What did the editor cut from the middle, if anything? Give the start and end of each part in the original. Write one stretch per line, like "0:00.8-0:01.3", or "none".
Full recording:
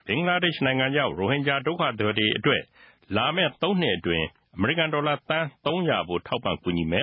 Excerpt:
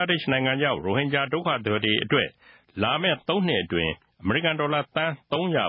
none